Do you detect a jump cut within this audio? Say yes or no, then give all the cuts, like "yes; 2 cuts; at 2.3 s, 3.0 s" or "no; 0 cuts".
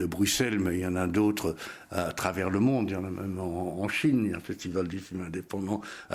no; 0 cuts